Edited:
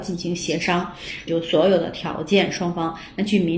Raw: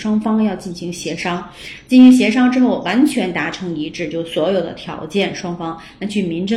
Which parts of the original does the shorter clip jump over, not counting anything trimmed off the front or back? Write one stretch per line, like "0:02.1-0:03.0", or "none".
0:01.8-0:04.1